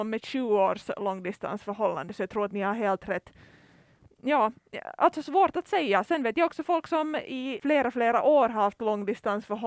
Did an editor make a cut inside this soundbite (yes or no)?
no